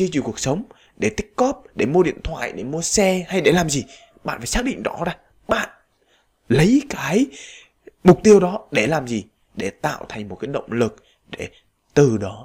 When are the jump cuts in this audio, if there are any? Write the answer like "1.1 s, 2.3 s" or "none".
none